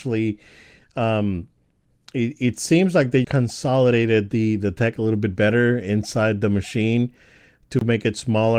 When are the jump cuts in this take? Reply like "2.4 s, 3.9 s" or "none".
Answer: 3.2 s